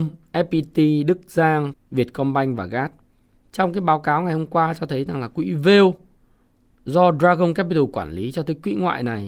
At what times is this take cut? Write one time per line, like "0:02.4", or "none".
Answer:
0:01.7
0:03.4